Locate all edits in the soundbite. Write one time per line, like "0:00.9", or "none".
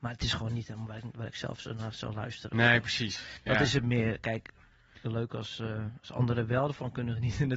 0:05.0